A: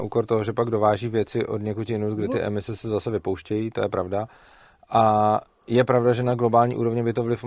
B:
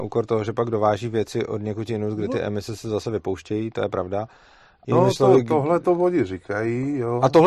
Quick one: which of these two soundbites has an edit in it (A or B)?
B